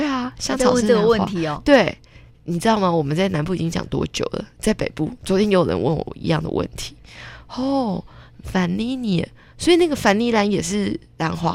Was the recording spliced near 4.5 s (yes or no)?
no